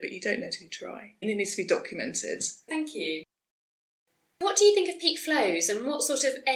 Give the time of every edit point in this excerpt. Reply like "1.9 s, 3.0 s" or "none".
1.2 s, 2.7 s